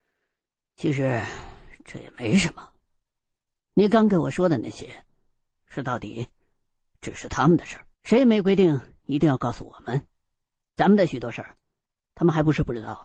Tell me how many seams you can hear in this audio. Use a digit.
2